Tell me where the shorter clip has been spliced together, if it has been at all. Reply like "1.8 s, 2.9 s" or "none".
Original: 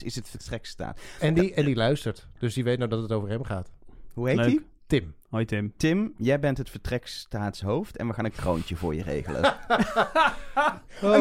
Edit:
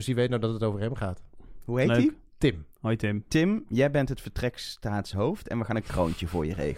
none